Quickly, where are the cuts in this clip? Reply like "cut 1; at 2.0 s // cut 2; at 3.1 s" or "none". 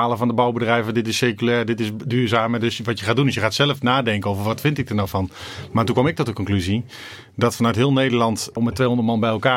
cut 1; at 8.6 s